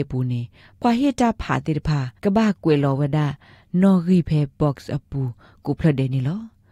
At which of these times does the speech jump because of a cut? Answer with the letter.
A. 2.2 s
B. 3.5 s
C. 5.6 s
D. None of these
A